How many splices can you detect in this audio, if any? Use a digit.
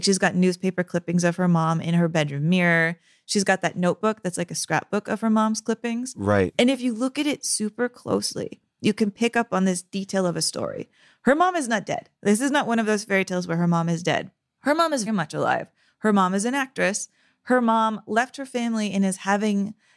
1